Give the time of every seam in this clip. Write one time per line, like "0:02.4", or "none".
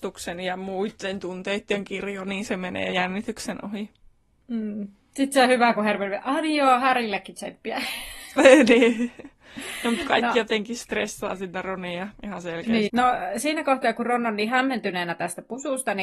0:12.9